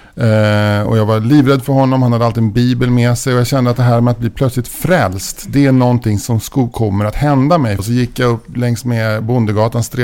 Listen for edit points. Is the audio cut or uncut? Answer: cut